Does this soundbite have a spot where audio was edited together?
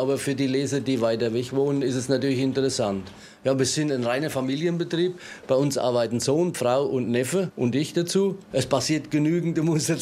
yes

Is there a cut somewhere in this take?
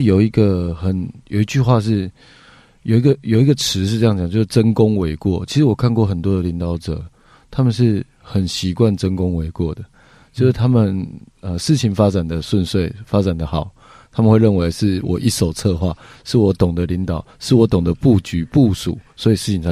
no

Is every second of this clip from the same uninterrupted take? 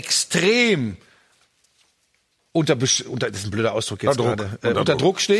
yes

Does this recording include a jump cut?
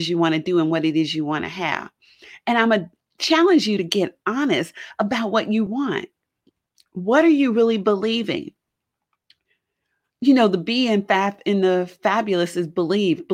yes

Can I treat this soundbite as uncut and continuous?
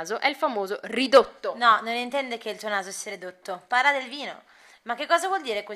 yes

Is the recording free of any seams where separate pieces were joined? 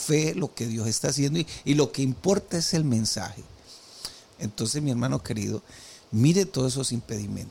no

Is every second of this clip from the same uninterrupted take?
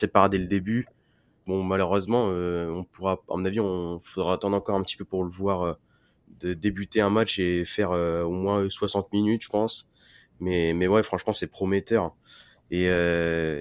no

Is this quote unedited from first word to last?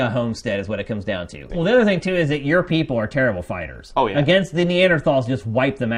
no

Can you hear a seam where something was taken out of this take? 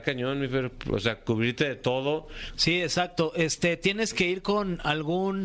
yes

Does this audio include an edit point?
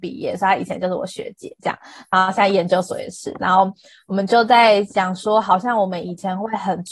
no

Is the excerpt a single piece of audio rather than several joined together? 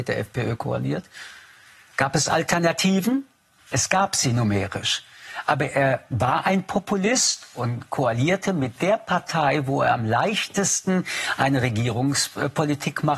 yes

